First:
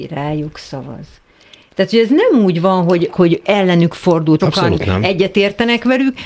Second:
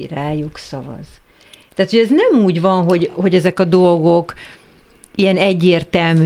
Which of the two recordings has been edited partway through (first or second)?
first